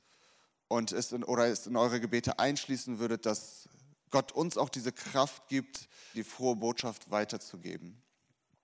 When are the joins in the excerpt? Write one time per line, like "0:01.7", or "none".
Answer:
0:06.1